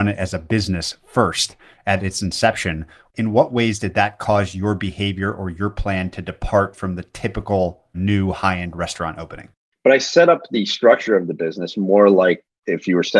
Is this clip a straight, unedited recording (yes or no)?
no